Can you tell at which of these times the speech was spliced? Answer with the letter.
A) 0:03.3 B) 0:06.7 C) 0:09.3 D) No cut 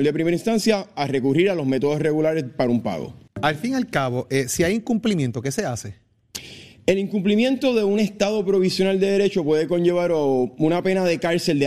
A